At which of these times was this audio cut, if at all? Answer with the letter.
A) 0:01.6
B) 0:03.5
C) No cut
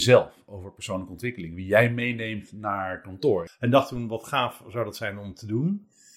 B